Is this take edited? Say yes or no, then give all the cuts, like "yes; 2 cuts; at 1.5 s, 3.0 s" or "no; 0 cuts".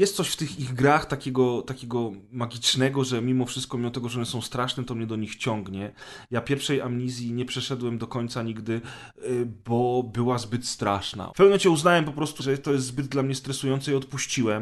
yes; 2 cuts; at 11.3 s, 12.4 s